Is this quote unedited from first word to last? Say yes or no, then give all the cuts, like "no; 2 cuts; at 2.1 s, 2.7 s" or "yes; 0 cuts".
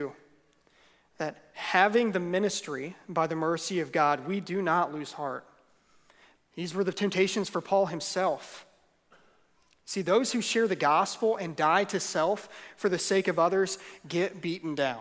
no; 1 cut; at 6.4 s